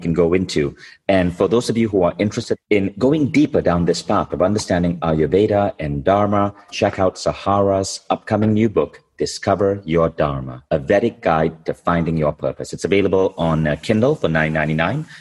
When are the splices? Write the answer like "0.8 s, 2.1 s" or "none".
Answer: 6.7 s, 10.7 s

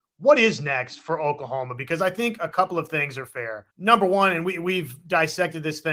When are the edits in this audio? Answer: 3.7 s

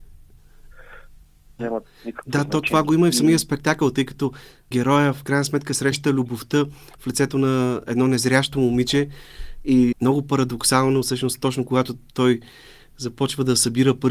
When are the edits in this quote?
1.6 s

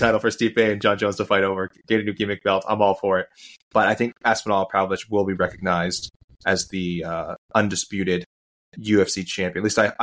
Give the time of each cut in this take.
none

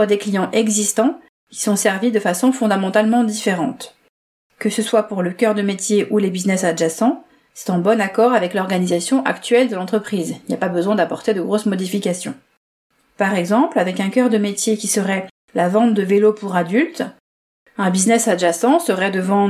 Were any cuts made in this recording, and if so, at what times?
none

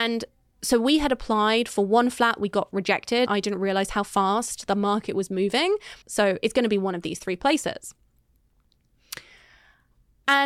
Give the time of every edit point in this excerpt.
3.3 s, 6.0 s

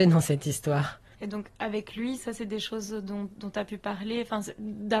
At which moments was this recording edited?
1.1 s, 2.2 s

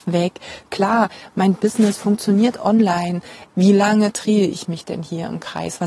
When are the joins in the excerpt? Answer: 3.5 s

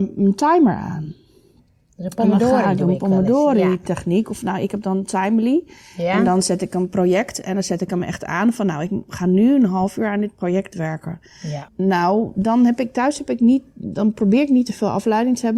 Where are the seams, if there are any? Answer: 11.7 s

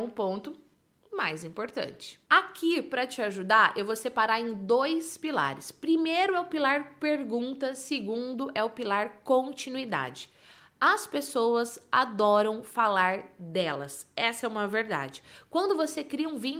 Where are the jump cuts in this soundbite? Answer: none

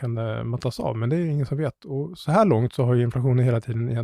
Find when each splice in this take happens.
none

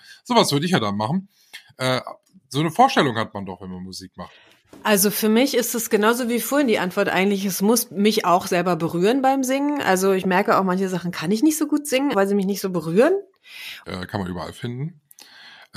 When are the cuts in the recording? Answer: 12.1 s, 13.8 s

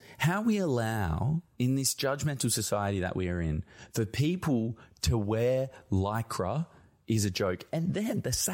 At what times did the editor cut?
none

